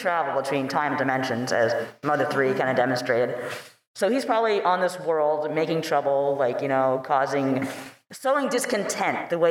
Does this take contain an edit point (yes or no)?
no